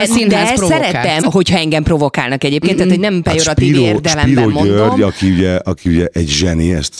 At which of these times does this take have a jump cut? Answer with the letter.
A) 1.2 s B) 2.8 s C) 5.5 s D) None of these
A